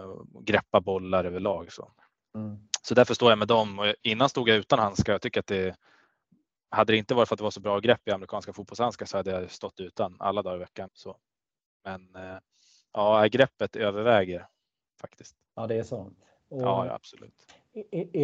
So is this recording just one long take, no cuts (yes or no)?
no